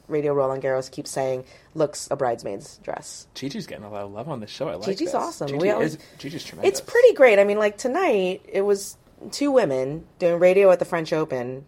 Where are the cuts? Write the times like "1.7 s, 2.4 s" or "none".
2.1 s